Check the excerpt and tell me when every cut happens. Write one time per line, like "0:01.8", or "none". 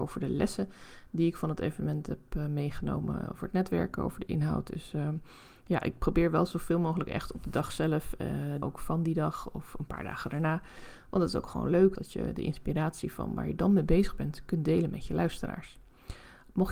0:08.6
0:11.9